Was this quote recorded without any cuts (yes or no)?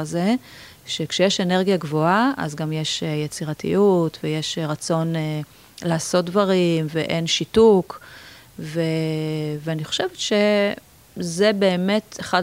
yes